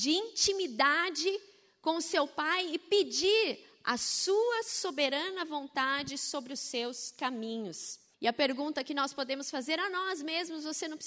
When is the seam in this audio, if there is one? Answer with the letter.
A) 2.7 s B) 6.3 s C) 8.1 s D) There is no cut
C